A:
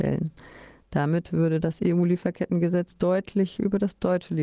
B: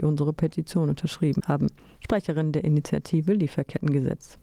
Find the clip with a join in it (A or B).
B